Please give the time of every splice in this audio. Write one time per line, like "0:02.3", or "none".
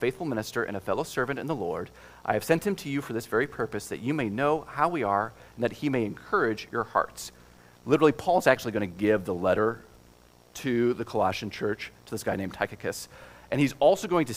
none

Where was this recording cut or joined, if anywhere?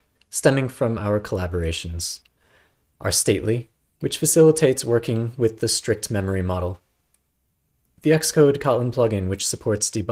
none

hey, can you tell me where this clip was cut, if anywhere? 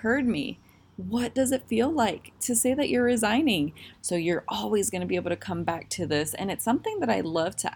0:03.9

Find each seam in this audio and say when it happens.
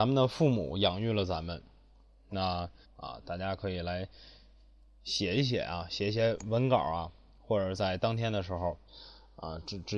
0:02.8

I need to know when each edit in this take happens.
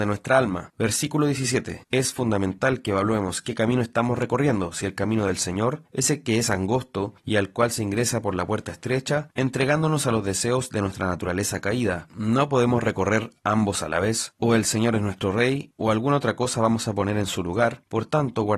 0:09.3

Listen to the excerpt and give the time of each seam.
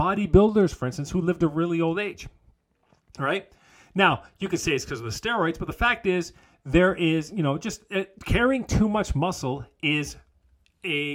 none

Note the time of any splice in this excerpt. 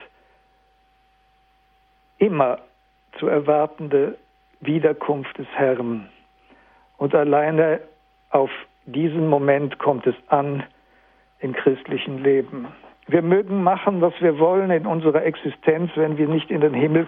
none

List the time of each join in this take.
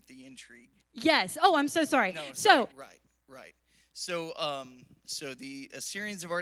0:02.7
0:05.0

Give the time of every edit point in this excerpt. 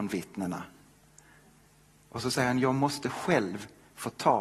none

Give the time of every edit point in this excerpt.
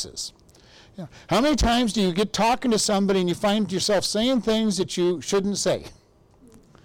none

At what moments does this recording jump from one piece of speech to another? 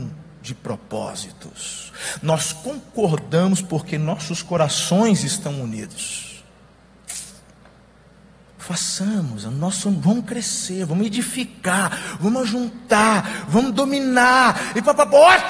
none

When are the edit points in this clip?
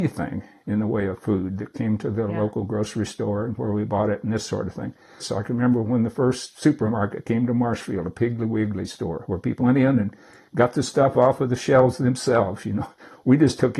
0:05.2
0:09.6

